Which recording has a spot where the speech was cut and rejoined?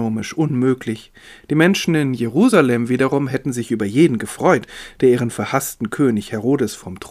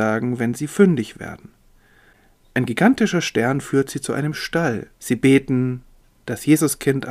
second; 1 cut; at 4.9 s

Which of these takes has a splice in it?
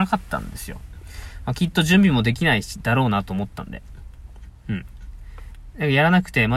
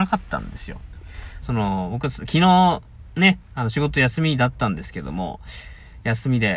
second; 1 cut; at 1.4 s

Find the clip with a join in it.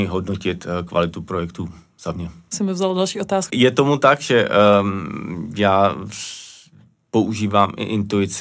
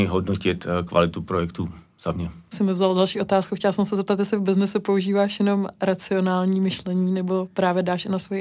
first; 1 cut; at 3.5 s

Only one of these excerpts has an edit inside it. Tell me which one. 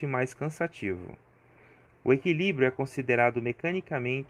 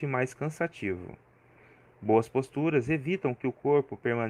first; 1 cut; at 1.9 s

